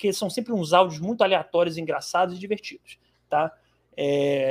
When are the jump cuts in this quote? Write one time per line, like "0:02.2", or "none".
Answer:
none